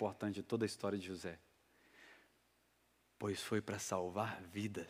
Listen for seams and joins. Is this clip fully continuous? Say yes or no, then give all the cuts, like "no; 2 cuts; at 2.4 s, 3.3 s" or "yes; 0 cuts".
yes; 0 cuts